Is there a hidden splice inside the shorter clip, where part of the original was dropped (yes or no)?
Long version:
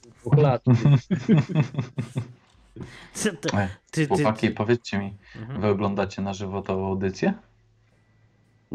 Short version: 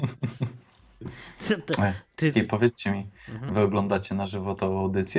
yes